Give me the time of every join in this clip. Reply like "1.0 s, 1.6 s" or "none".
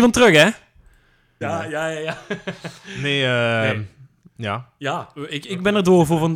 1.4 s